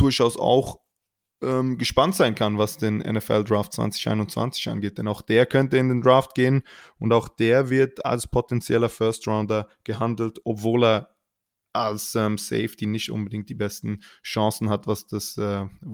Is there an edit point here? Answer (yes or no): no